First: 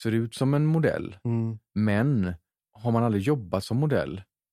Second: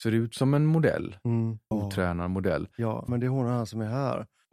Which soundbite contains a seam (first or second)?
second